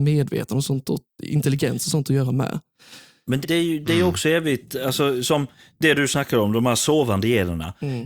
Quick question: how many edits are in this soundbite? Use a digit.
1